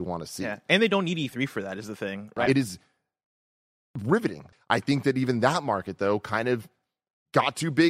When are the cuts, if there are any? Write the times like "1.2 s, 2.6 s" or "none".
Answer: 2.5 s, 4.5 s